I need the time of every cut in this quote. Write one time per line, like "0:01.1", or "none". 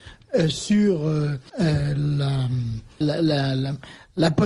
0:01.5
0:03.0